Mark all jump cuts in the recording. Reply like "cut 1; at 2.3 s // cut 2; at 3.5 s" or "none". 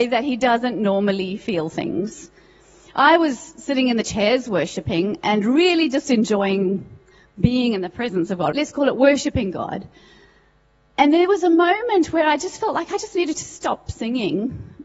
cut 1; at 8.5 s